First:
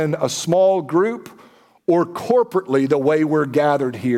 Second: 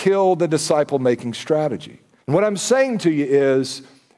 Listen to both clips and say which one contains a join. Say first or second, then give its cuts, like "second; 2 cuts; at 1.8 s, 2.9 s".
second; 1 cut; at 2.2 s